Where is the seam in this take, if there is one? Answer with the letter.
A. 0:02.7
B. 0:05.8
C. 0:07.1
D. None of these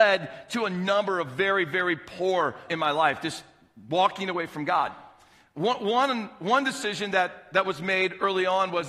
A